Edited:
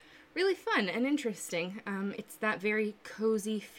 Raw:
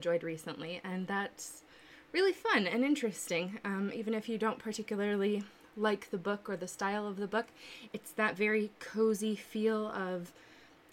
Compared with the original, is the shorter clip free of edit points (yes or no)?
no